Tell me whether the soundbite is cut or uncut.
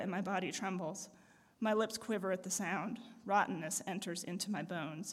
uncut